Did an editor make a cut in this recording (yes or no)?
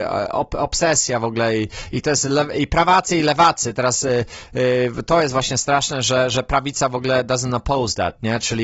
no